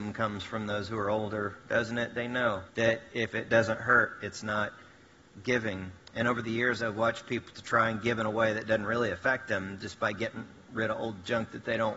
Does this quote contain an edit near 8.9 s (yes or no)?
no